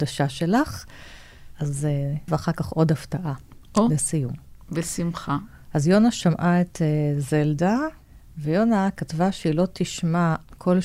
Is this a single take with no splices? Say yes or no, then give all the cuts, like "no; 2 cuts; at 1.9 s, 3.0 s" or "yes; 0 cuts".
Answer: no; 1 cut; at 2.3 s